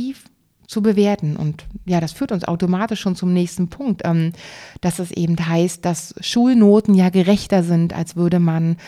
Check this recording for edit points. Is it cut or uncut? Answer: uncut